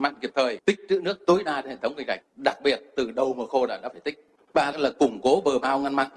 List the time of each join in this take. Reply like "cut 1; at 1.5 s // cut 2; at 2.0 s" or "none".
cut 1; at 4.7 s

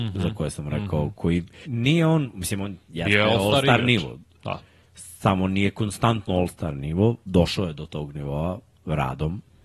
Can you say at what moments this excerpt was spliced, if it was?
cut 1; at 1.6 s

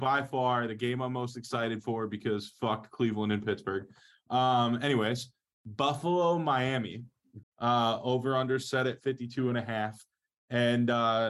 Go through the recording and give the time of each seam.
cut 1; at 7.4 s

